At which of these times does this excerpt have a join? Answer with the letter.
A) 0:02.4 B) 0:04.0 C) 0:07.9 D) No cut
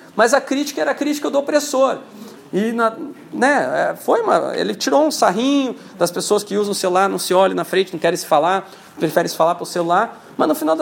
A